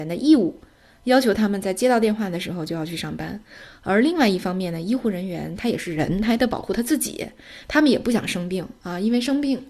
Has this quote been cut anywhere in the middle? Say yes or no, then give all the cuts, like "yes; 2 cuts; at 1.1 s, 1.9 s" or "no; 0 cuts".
no; 0 cuts